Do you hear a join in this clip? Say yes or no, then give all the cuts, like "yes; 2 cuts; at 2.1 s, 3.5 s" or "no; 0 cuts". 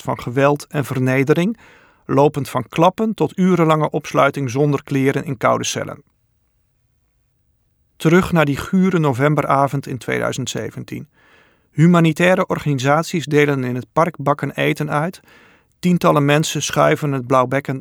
no; 0 cuts